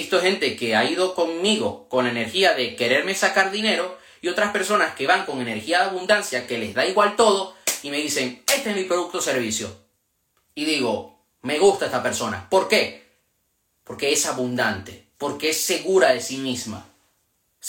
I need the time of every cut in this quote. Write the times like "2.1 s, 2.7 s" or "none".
none

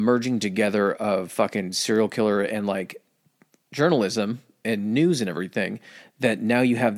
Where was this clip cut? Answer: none

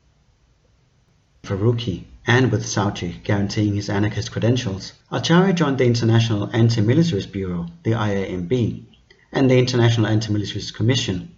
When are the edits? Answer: 1.4 s, 5.0 s

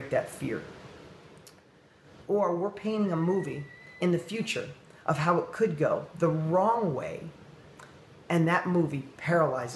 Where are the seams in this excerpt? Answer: 2.2 s

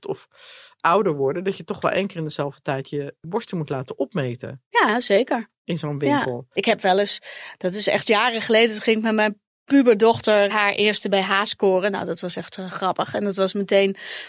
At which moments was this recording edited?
10.5 s

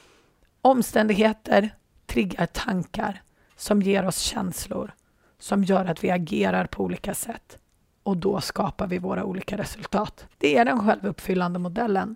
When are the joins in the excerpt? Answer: 10.3 s

